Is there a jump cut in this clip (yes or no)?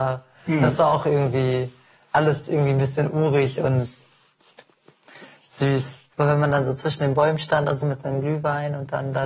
yes